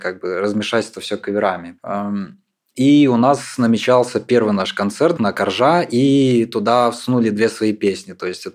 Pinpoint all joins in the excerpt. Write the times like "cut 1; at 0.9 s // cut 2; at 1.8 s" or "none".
cut 1; at 1.8 s // cut 2; at 5.2 s